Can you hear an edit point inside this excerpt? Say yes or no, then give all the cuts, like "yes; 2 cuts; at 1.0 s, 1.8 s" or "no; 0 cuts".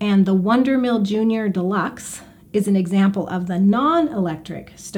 no; 0 cuts